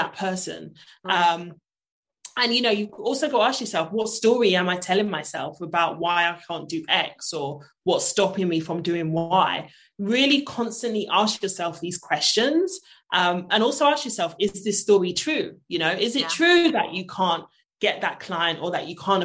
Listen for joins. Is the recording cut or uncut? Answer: uncut